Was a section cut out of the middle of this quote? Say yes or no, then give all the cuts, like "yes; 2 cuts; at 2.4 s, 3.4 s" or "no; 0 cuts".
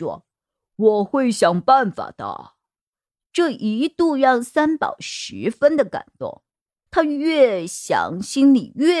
yes; 1 cut; at 6.9 s